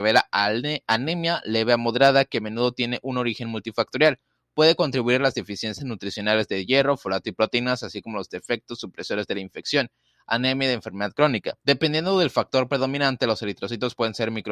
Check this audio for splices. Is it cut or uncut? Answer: cut